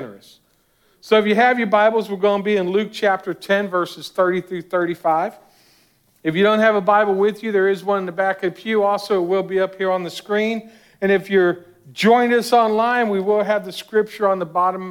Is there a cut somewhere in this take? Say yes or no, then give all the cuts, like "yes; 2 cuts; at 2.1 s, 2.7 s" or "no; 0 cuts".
no; 0 cuts